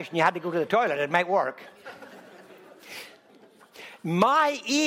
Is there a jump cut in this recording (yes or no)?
no